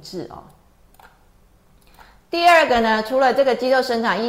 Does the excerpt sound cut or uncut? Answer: uncut